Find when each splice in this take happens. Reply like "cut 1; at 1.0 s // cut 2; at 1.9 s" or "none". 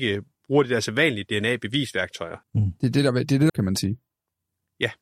cut 1; at 2.4 s // cut 2; at 3.5 s